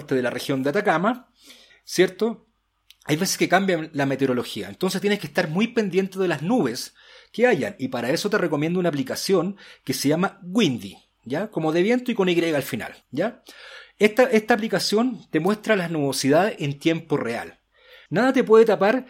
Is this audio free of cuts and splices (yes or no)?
no